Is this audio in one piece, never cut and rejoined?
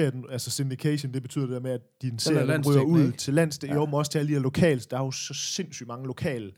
yes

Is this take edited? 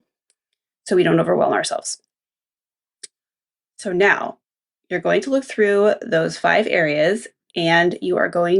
no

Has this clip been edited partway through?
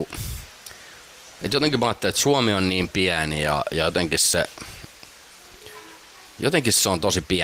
no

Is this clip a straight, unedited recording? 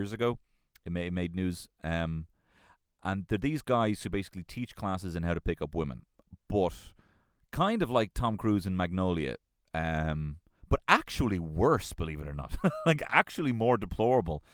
yes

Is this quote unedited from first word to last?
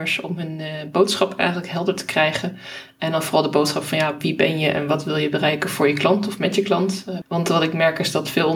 no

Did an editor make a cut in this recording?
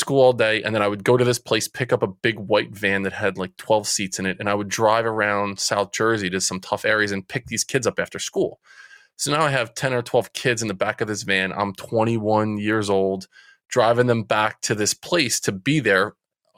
no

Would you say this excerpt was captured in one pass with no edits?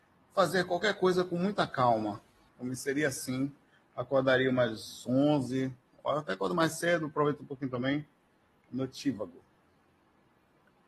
no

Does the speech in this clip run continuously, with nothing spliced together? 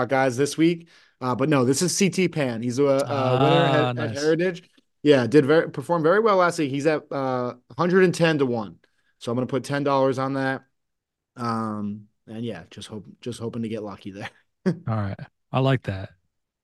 yes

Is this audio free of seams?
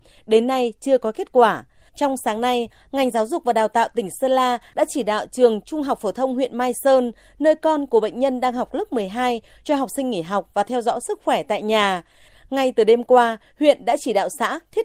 no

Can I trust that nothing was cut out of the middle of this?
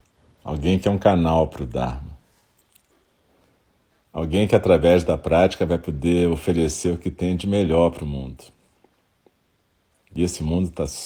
yes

